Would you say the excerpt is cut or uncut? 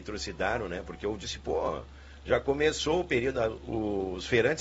uncut